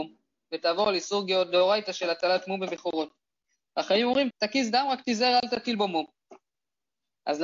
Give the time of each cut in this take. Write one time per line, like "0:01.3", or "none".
0:04.3